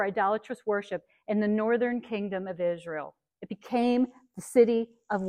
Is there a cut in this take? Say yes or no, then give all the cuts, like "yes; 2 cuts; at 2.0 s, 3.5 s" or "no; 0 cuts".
no; 0 cuts